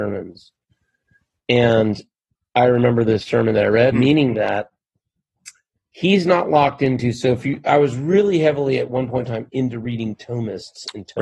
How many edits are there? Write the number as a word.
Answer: one